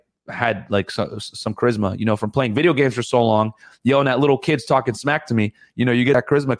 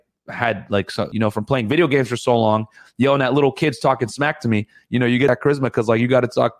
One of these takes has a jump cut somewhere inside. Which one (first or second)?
second